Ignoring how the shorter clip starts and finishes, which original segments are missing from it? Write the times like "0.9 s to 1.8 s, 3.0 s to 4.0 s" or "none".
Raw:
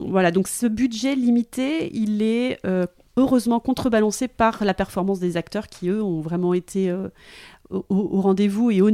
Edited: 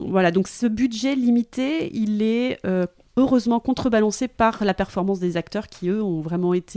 none